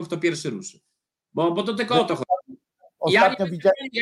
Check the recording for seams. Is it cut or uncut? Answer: uncut